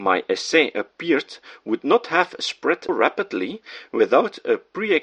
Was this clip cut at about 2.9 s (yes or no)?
yes